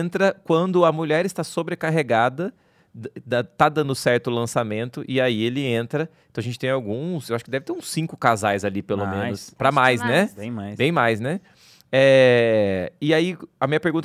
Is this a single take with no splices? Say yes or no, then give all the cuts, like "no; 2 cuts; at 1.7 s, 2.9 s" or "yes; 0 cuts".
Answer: yes; 0 cuts